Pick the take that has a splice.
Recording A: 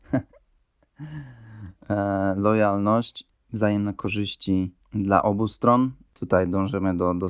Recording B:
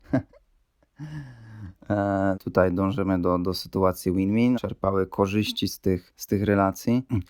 B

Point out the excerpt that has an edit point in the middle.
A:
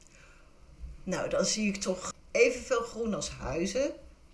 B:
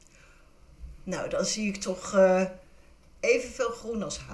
A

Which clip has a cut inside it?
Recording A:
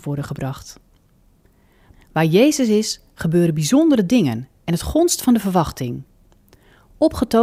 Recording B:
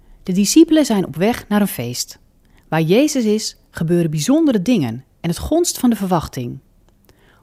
A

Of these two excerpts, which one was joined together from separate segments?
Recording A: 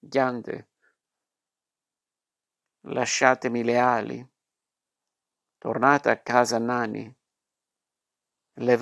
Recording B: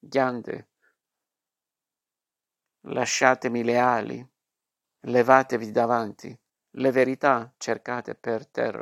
B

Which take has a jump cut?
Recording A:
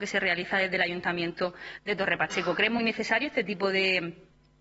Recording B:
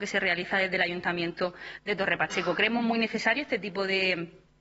A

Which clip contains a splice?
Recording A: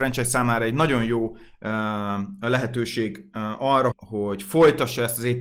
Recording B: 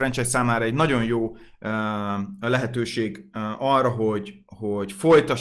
A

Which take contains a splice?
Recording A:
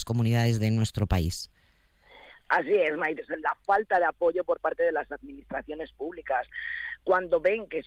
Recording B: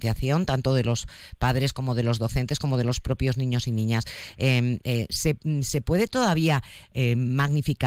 A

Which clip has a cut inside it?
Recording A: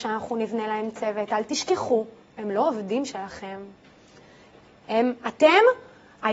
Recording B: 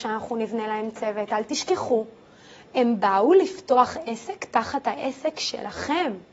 A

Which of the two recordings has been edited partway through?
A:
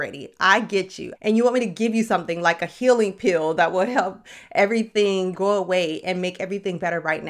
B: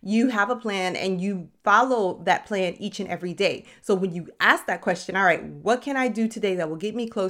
A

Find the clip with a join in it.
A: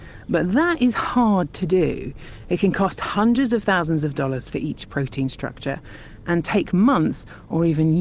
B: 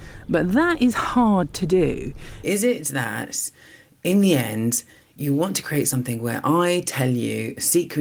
B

